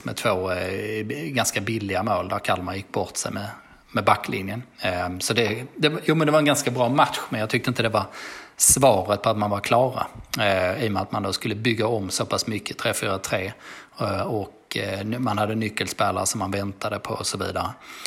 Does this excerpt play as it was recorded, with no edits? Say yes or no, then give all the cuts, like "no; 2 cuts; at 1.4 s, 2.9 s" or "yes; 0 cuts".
yes; 0 cuts